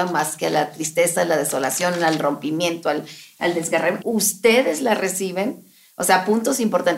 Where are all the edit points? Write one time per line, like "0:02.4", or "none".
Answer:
0:04.0